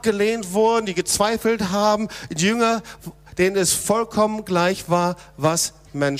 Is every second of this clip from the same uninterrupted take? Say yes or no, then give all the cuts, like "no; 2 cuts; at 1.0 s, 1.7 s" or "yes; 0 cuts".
yes; 0 cuts